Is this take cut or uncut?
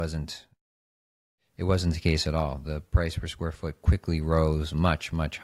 uncut